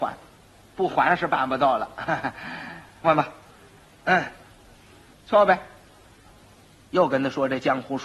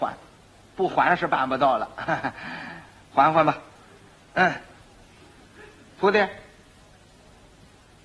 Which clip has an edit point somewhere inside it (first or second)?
first